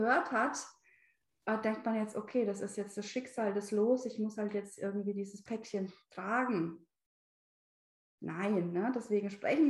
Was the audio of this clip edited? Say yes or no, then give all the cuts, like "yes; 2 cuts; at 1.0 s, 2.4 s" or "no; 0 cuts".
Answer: no; 0 cuts